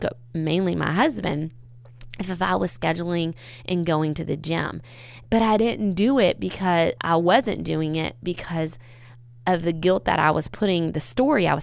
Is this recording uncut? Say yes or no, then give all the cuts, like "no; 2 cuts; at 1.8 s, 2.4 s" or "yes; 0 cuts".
no; 2 cuts; at 5.2 s, 7.0 s